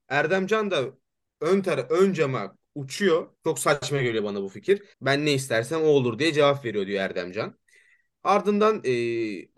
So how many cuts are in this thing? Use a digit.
2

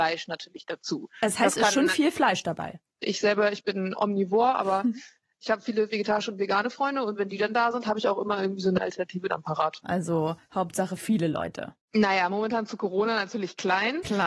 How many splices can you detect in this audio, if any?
2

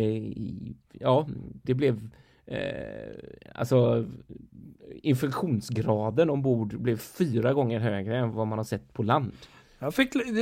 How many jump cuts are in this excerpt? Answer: 2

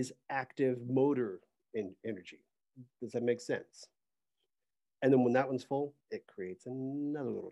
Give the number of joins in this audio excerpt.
2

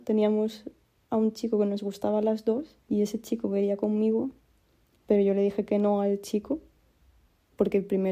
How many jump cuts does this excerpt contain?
1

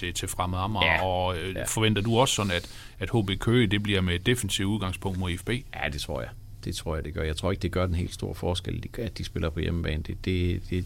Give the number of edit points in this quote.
0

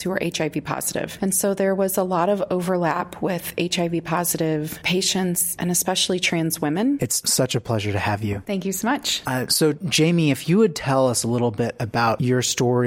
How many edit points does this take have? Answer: 1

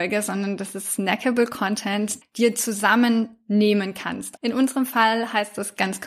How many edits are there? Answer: 2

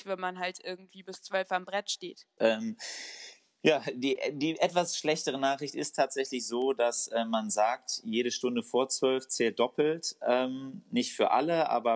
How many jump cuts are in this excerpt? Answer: 1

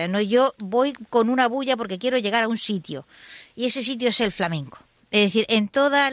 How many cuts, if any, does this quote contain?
0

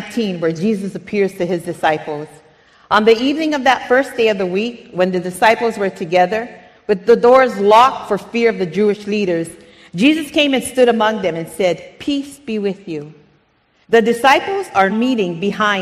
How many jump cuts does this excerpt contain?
2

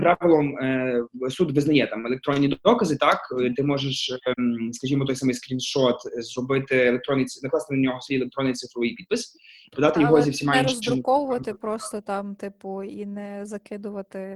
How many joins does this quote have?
0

